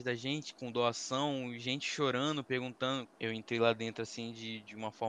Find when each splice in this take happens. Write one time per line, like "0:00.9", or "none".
0:03.1